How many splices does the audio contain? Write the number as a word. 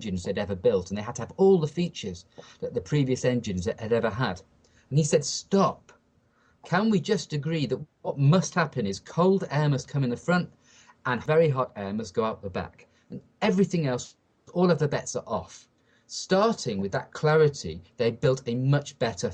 zero